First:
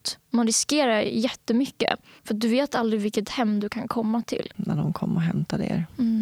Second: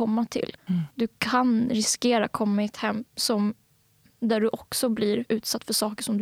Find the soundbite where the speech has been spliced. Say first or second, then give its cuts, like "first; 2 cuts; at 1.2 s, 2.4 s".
first; 2 cuts; at 2.2 s, 4.5 s